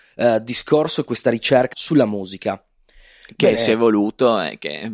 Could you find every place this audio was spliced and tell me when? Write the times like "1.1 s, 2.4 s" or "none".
1.7 s